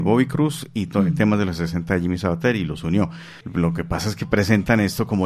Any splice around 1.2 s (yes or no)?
no